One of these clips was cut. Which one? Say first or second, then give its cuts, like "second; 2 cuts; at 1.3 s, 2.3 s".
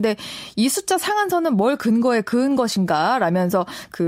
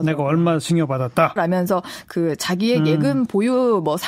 second; 1 cut; at 1.4 s